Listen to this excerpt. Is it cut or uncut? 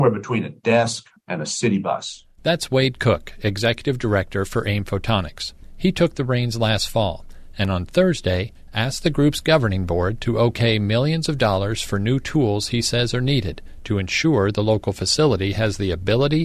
uncut